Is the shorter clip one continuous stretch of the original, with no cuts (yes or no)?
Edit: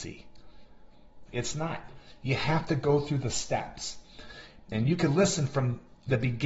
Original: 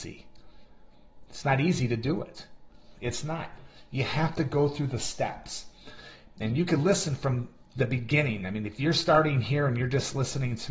no